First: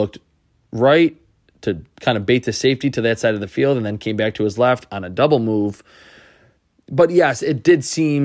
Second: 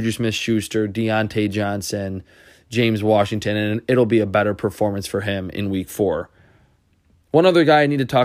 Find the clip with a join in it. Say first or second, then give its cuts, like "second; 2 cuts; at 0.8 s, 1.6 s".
first; 1 cut; at 4.9 s